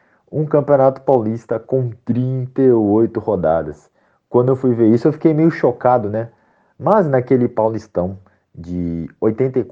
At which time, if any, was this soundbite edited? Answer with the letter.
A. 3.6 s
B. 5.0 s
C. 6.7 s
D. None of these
C